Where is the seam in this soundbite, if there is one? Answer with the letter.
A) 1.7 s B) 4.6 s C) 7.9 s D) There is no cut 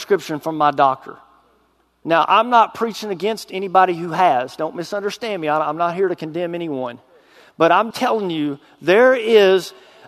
C